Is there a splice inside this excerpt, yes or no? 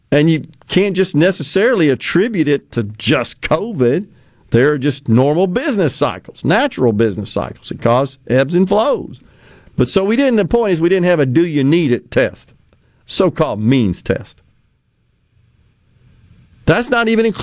no